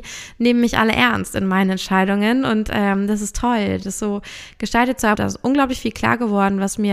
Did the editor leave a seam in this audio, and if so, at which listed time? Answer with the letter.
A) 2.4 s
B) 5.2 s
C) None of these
B